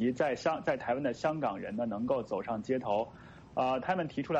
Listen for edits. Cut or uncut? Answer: uncut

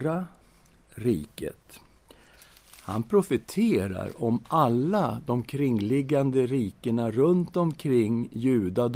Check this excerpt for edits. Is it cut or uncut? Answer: uncut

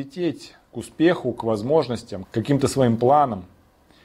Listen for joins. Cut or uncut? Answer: cut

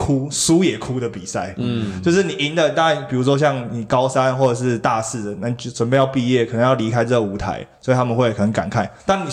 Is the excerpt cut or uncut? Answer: uncut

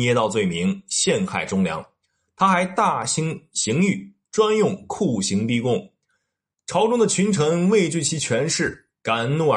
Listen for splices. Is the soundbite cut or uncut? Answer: uncut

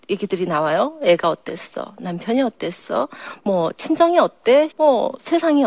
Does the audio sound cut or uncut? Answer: cut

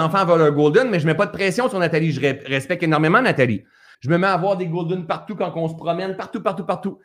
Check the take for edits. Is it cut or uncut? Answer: cut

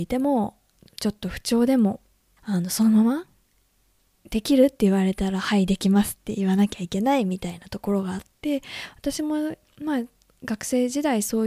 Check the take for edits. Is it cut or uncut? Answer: cut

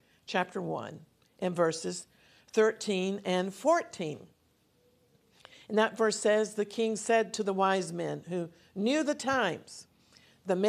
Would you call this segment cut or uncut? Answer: uncut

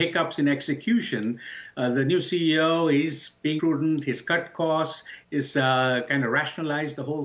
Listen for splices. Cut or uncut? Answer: cut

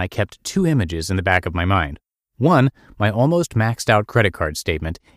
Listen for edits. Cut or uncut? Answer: uncut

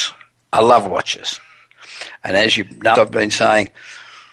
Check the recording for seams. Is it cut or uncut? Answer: cut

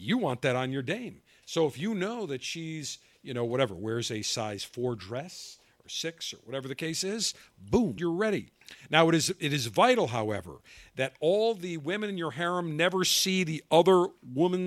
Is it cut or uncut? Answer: cut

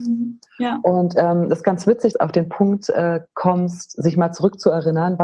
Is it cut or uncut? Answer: cut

